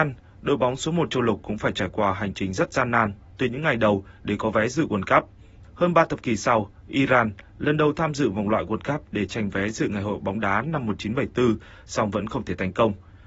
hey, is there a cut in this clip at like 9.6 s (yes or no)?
no